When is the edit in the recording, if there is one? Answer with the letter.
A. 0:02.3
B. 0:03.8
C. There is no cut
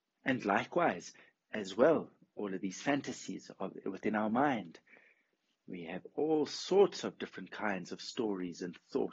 C